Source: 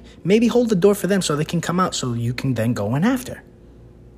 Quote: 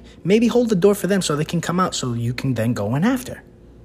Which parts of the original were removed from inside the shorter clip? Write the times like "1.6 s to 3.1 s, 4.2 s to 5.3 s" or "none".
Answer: none